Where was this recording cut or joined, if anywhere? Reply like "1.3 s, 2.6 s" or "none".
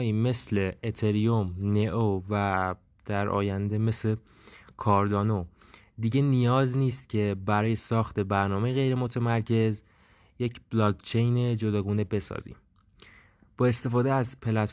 none